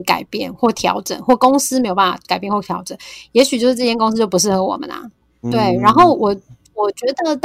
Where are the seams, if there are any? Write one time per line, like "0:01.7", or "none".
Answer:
0:05.4